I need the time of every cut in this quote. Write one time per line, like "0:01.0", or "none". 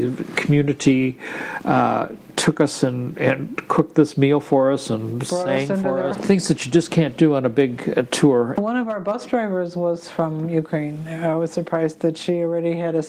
0:06.1
0:08.6